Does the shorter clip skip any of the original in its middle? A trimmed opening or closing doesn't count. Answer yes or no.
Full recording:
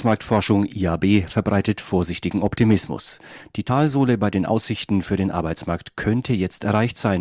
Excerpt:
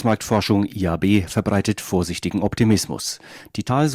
no